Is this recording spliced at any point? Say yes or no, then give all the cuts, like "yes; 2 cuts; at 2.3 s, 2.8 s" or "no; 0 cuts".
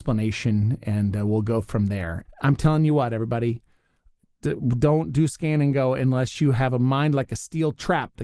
yes; 1 cut; at 2.2 s